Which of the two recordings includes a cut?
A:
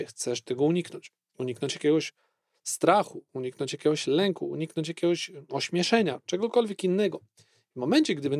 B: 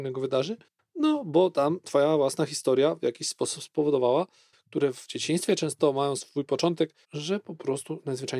B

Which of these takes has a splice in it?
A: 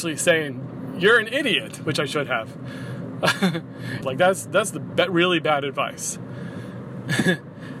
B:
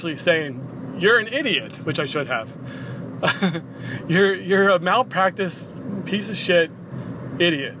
A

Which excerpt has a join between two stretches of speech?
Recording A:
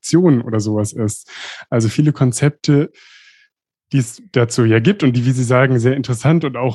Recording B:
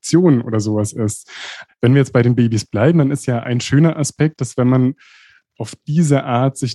B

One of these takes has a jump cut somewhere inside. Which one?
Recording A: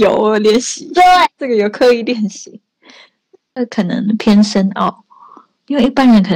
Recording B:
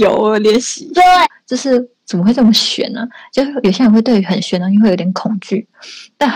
B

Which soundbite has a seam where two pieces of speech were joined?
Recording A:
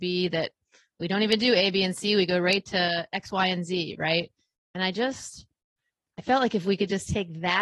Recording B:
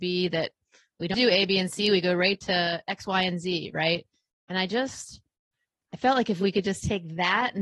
B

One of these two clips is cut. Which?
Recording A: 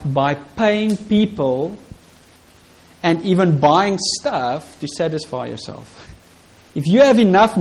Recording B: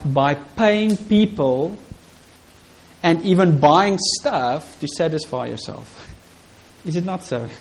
B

